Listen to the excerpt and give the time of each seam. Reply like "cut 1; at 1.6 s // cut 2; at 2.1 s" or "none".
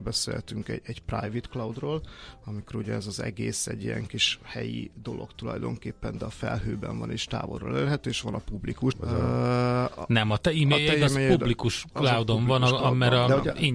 cut 1; at 8.9 s